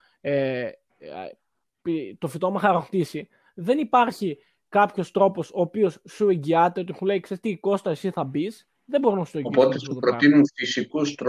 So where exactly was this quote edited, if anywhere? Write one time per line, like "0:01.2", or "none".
0:08.7